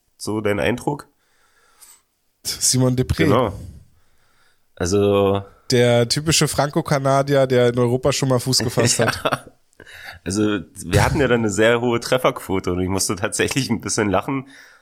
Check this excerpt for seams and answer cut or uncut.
cut